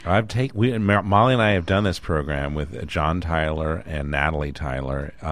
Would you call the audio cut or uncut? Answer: uncut